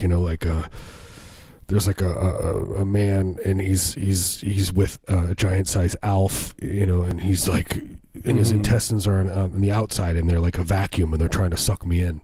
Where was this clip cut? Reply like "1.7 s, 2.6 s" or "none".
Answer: none